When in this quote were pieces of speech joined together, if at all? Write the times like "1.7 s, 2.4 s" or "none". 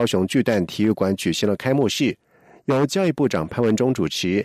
none